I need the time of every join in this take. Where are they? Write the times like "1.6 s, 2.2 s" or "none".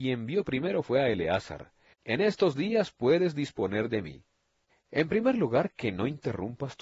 1.9 s, 4.7 s